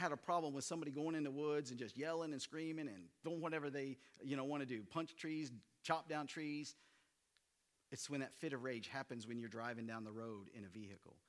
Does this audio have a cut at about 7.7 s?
yes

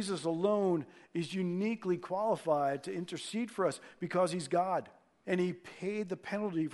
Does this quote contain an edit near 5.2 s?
yes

